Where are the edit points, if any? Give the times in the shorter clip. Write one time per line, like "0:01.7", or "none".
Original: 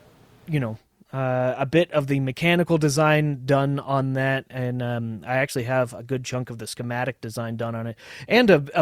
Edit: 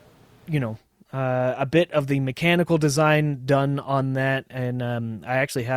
none